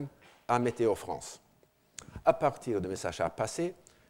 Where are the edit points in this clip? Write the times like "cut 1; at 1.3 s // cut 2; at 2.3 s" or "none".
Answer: none